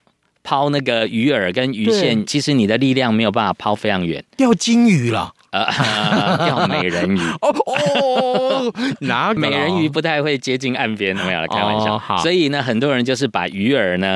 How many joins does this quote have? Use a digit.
2